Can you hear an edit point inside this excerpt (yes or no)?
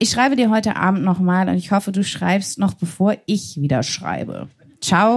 no